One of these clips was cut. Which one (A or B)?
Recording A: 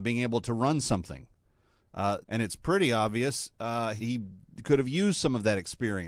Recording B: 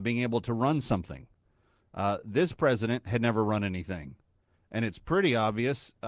A